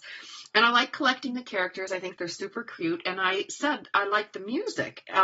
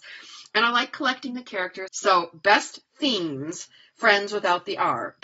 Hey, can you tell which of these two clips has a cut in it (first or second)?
second